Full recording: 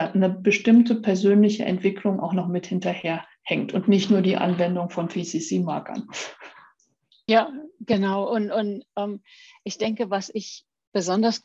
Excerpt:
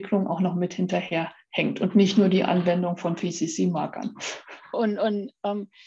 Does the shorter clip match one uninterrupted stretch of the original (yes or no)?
no